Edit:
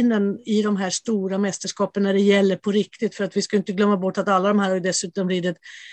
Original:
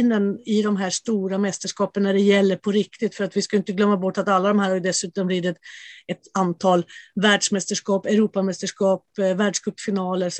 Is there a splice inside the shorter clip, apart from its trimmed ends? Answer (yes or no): no